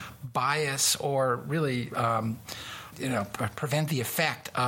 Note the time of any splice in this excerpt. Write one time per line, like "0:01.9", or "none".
0:01.9
0:02.9